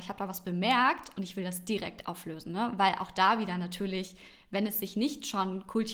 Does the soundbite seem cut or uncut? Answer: uncut